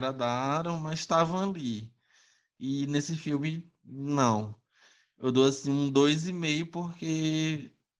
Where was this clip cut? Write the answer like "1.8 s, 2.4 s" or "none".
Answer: none